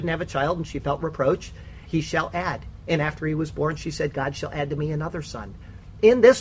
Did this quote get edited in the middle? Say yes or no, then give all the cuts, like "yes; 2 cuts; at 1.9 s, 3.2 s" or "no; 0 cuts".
yes; 1 cut; at 1.8 s